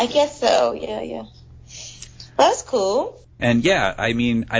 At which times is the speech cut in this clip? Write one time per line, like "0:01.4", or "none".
0:03.4